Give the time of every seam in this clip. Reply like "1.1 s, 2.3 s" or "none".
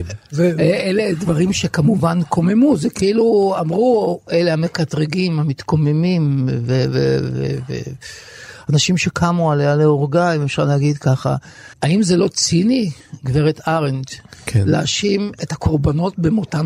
11.7 s

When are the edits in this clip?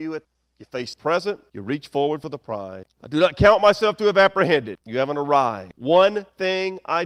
2.9 s, 4.8 s

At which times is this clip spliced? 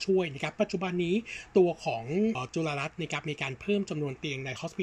2.4 s

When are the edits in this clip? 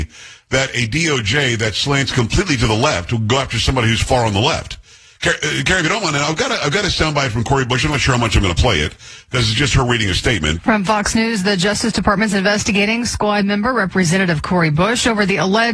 10.6 s

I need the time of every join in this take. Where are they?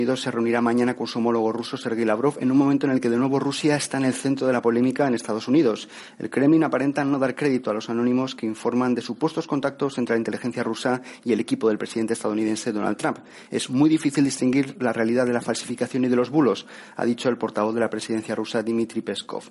none

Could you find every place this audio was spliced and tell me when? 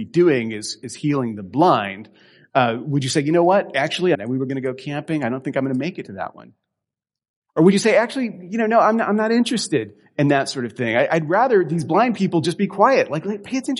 4.1 s

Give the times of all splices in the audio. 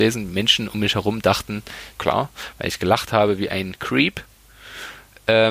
1.9 s

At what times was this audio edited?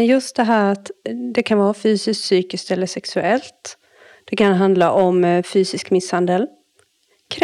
none

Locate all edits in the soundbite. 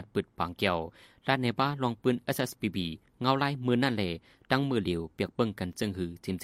none

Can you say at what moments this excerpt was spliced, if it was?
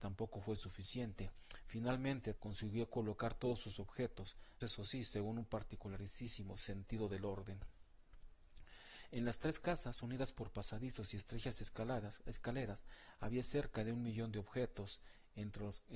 2.4 s, 4.6 s

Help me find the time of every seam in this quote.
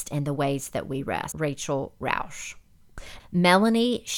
1.3 s, 3.2 s

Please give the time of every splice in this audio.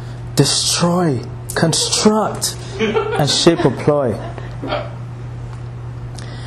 none

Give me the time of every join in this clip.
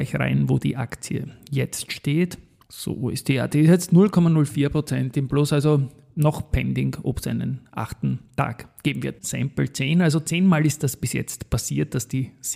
9.2 s

